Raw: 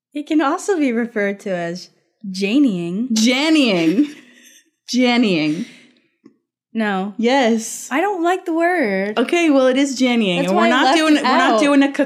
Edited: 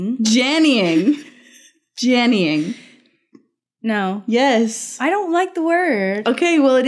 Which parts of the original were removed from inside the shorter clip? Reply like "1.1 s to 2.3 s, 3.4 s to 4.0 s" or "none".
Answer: none